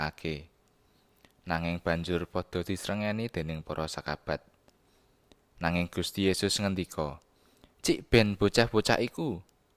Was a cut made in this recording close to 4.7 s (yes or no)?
no